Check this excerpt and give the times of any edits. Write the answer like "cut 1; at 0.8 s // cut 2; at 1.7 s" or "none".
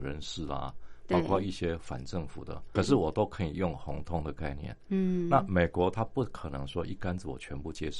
cut 1; at 2.8 s